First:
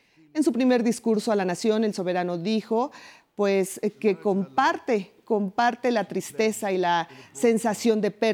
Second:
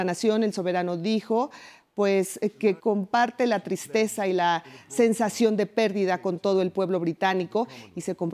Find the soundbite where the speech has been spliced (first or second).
second